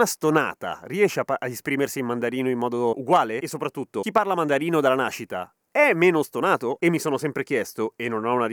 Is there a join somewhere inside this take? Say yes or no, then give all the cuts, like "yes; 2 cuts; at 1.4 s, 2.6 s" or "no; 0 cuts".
yes; 1 cut; at 6.8 s